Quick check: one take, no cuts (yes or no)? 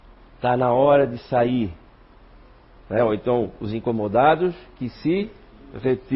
yes